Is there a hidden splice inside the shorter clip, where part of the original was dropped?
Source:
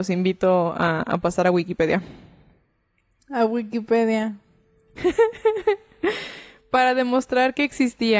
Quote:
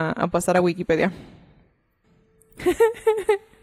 yes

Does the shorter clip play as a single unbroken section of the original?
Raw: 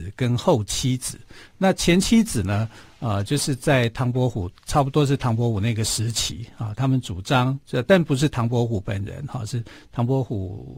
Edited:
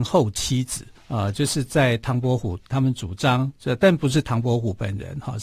no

